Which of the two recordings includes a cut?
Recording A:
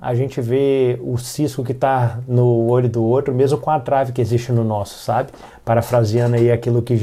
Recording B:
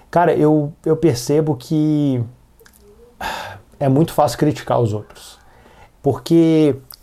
B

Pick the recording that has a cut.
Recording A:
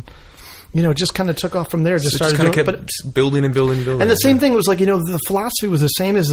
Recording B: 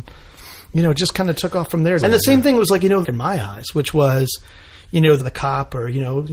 B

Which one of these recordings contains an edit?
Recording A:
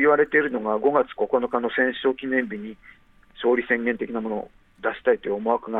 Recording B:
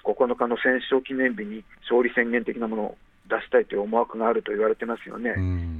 B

